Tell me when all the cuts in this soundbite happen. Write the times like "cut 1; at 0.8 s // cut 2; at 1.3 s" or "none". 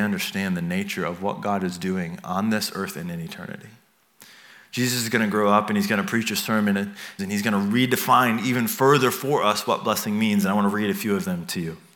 cut 1; at 7.2 s